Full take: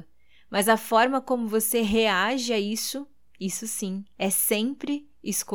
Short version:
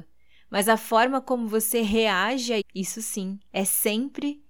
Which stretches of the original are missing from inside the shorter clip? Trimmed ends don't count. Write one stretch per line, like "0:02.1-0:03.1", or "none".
0:02.6-0:03.3